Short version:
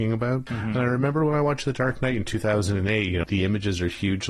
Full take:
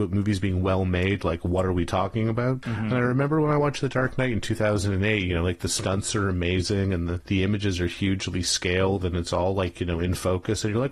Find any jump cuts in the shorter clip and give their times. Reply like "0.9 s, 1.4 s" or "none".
3.2 s